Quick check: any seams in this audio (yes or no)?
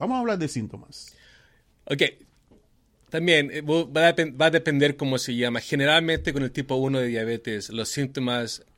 no